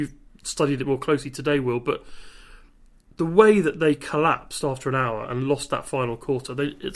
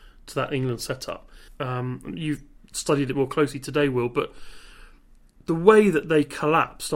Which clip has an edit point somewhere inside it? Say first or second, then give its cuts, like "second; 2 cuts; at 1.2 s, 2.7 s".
second; 1 cut; at 1.5 s